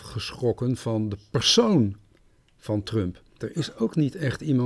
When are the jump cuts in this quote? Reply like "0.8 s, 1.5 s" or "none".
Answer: 3.4 s